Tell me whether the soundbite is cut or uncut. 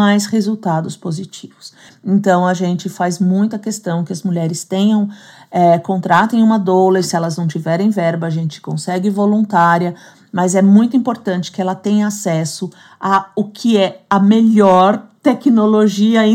uncut